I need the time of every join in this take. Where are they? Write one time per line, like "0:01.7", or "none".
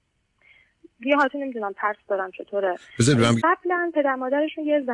0:03.4